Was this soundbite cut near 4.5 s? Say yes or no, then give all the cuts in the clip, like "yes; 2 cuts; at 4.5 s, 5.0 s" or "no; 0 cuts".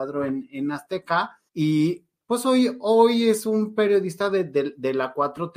no; 1 cut; at 1.5 s